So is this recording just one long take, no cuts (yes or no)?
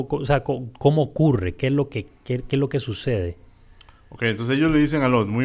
yes